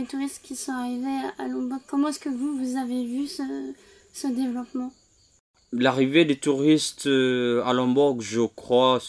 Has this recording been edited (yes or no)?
no